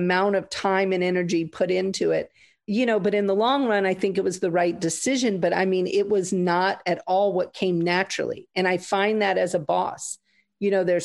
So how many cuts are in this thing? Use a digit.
0